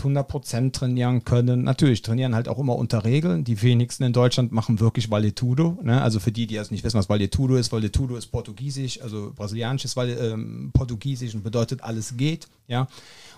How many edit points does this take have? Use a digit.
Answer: 0